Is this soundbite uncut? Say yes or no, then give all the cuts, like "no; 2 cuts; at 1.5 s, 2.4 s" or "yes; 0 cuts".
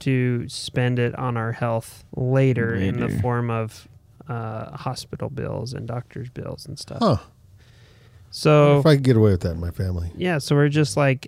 no; 1 cut; at 2.1 s